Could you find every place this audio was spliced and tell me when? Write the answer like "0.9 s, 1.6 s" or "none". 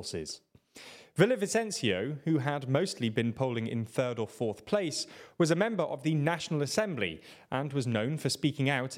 1.0 s